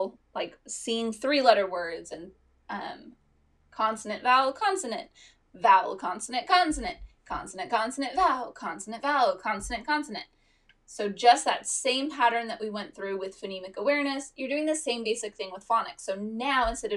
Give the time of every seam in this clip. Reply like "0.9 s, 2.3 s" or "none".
none

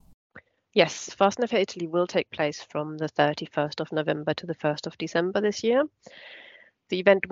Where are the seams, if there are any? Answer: none

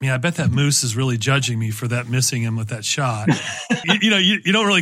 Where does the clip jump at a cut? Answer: 3.8 s

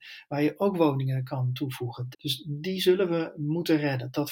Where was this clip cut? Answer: 2.1 s

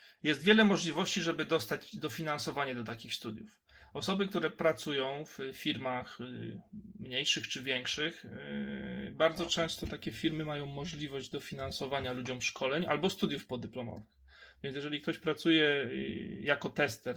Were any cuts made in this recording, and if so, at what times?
none

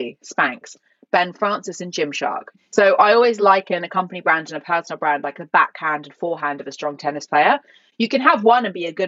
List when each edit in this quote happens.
2.6 s

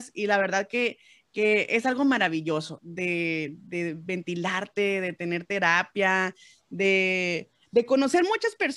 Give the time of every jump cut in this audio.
2.8 s

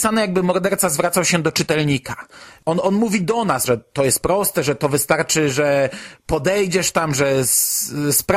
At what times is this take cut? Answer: 3.7 s

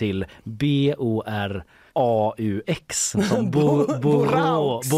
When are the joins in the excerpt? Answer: 1.9 s

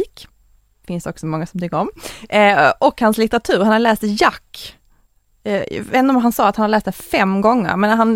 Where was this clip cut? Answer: none

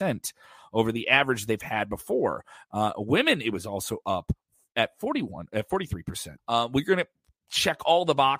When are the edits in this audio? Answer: 6.4 s

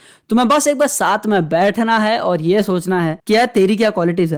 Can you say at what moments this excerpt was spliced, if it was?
3.2 s

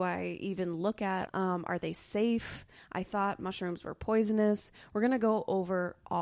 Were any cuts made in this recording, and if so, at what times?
1.3 s

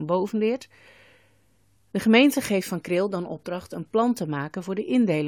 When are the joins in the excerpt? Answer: 1.8 s

